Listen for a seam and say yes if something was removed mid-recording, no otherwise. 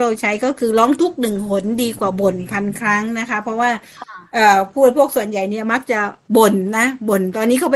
no